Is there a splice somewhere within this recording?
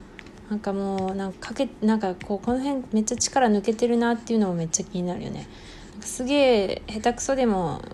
yes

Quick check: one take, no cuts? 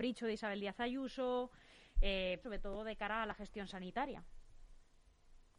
no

